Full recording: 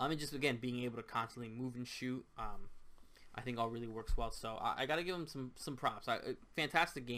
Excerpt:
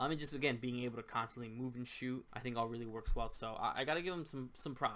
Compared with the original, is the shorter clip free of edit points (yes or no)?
no